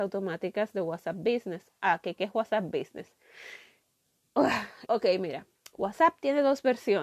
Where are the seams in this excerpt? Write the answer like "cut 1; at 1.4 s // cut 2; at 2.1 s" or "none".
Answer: cut 1; at 4.9 s